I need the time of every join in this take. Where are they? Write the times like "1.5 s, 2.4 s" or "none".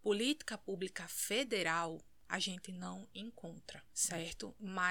3.9 s

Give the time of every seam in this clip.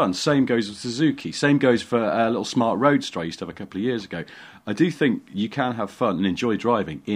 none

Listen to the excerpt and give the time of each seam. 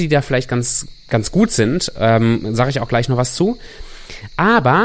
none

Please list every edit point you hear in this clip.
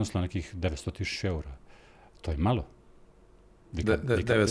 none

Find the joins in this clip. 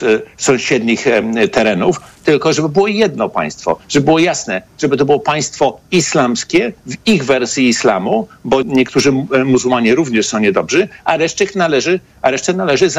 8.6 s

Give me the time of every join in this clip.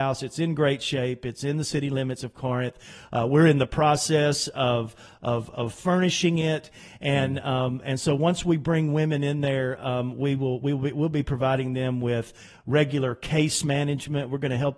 none

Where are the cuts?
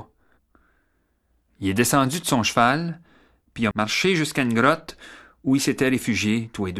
3.7 s

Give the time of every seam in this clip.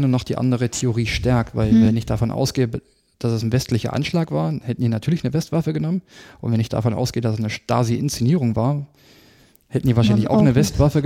none

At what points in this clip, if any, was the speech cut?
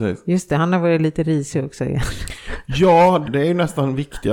3.2 s

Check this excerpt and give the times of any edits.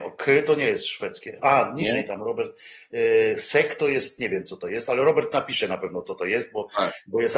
none

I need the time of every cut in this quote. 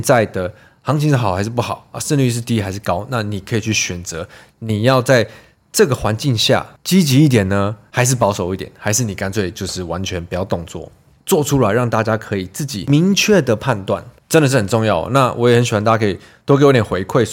11.2 s

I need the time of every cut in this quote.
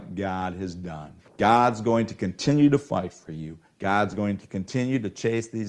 1.2 s

